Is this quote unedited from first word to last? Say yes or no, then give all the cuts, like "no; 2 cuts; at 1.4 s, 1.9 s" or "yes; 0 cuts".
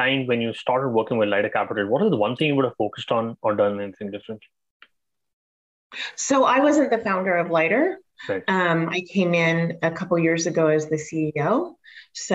yes; 0 cuts